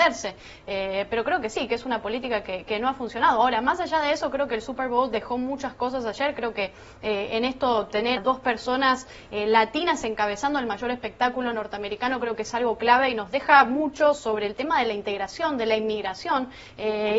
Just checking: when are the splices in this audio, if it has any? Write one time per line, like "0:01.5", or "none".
0:08.2